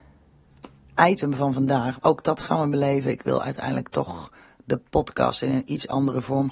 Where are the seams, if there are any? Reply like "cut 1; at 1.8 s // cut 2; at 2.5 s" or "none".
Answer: cut 1; at 2.0 s